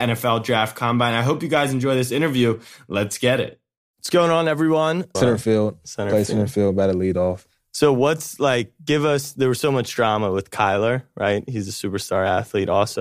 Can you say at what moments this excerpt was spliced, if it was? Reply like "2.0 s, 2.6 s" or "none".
5.1 s